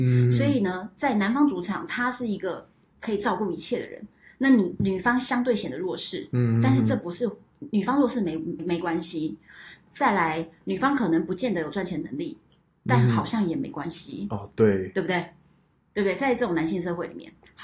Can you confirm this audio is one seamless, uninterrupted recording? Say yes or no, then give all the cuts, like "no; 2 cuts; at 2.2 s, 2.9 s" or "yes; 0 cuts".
no; 1 cut; at 8.6 s